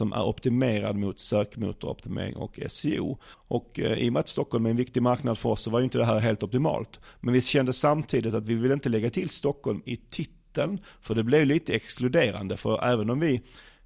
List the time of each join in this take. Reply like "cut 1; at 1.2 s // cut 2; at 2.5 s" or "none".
cut 1; at 3.2 s